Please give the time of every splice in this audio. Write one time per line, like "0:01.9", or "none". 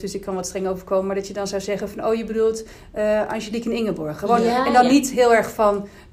none